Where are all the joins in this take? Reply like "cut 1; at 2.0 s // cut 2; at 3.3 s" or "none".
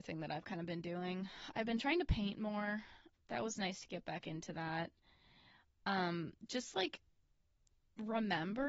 cut 1; at 3.1 s